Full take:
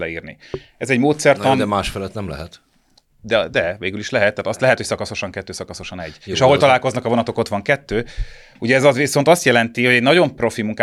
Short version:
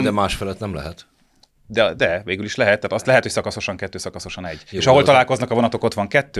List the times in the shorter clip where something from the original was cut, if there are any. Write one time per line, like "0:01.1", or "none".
none